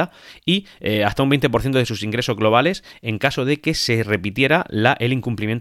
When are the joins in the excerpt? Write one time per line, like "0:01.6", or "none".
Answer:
none